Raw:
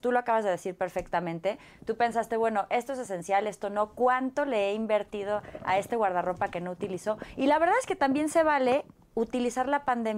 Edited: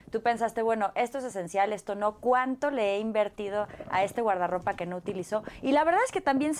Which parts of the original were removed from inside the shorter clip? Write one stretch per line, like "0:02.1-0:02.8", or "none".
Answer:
none